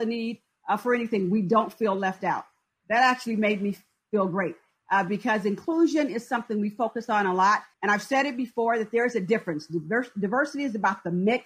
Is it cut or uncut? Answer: cut